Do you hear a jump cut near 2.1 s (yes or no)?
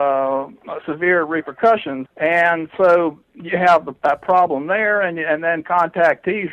yes